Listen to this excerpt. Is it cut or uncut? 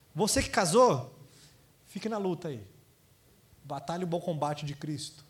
uncut